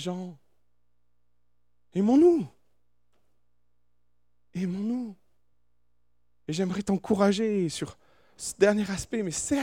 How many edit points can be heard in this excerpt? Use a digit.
0